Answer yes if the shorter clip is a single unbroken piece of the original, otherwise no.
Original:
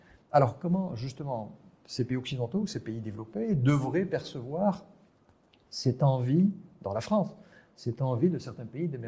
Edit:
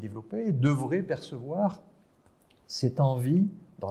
yes